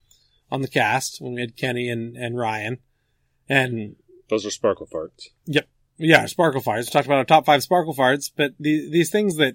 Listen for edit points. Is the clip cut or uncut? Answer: uncut